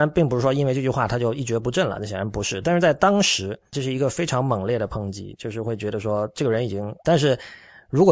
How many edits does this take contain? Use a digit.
2